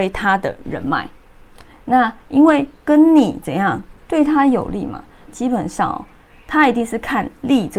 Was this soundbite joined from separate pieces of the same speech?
yes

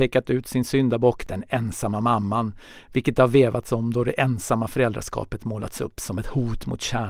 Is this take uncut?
yes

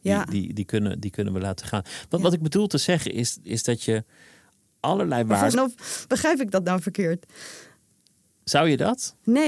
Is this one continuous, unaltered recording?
no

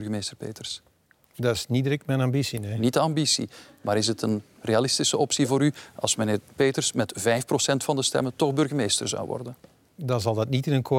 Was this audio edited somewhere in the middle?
no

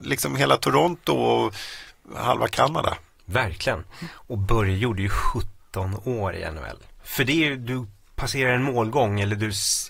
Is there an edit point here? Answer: yes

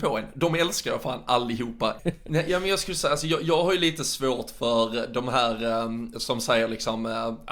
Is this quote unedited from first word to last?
no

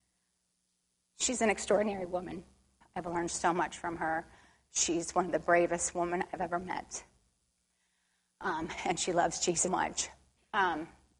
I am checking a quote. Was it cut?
yes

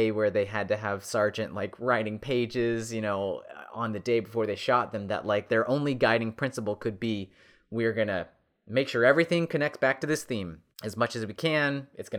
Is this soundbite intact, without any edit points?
no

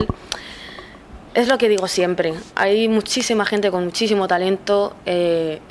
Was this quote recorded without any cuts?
yes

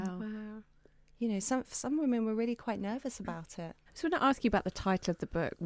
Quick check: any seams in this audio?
yes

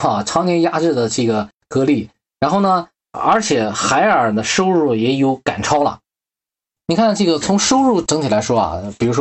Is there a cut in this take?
no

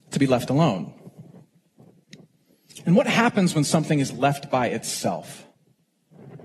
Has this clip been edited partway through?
no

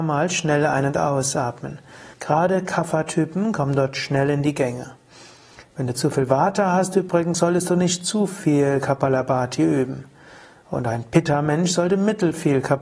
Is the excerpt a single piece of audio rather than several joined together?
no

